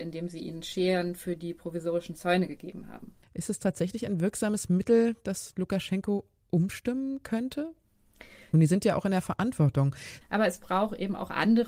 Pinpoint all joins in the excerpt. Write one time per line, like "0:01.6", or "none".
0:03.2
0:08.5
0:10.2

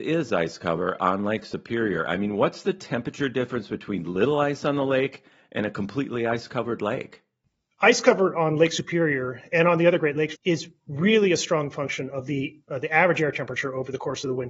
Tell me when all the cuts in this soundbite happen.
0:10.4

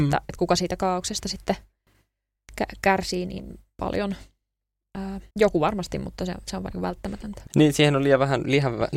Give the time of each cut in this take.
0:05.3
0:07.5

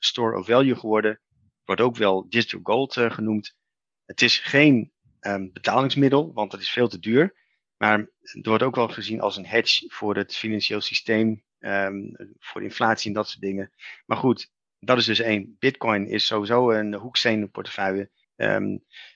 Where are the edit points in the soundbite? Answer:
0:18.2

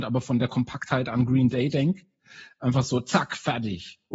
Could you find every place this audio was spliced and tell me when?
none

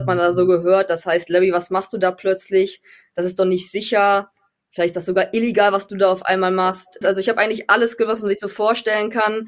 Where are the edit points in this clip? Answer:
0:07.0

